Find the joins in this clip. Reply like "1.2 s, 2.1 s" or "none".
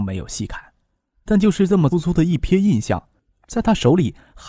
1.9 s, 3.3 s